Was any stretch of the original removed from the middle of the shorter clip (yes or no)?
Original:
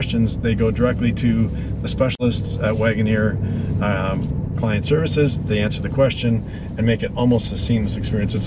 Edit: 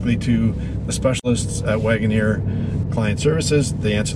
yes